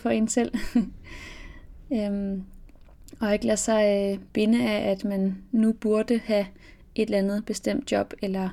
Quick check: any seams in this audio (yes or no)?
no